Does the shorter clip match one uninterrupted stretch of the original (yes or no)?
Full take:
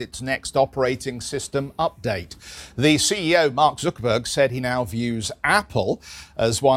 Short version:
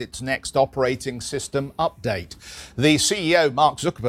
yes